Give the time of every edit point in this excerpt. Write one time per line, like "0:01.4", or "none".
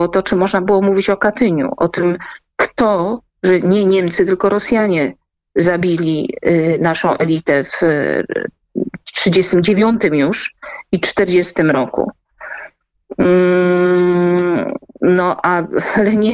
0:03.3